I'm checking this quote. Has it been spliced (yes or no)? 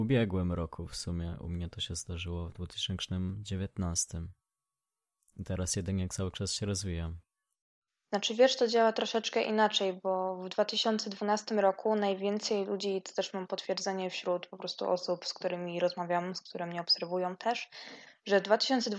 no